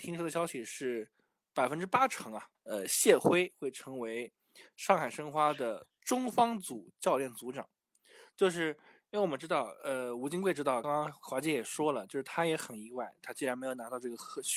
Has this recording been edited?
yes; 3 cuts; at 2.5 s, 8.3 s, 10.8 s

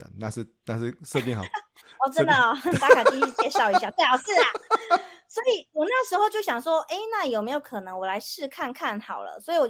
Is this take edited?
no; 0 cuts

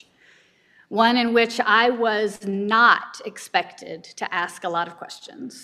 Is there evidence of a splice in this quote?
no; 0 cuts

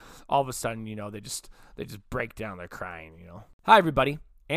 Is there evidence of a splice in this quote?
no; 0 cuts

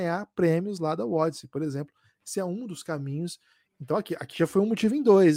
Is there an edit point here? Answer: no; 0 cuts

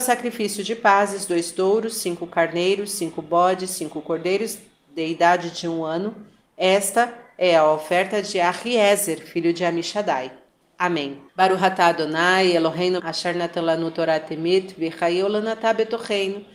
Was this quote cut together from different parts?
yes; 2 cuts; at 11.3 s, 13.0 s

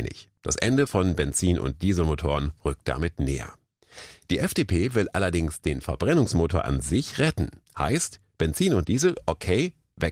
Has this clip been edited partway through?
no; 0 cuts

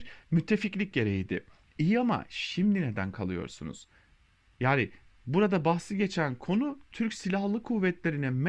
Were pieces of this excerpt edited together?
no; 0 cuts

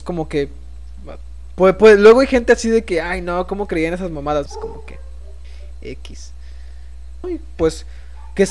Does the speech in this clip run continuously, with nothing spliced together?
no; 2 cuts; at 4.5 s, 7.2 s

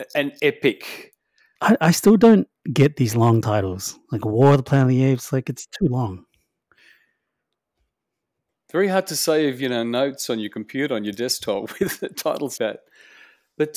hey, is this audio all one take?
no; 2 cuts; at 1.6 s, 12.6 s

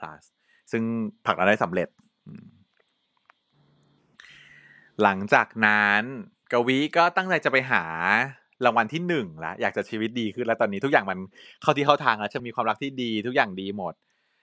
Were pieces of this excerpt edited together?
yes; 1 cut; at 12.4 s

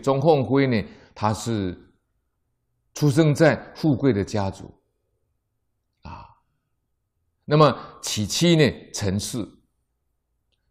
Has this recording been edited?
no; 0 cuts

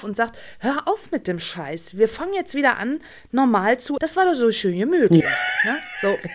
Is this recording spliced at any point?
yes; 2 cuts; at 4.0 s, 5.2 s

